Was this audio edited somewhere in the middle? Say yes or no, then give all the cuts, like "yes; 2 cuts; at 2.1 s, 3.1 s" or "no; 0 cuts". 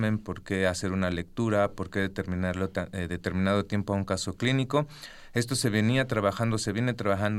no; 0 cuts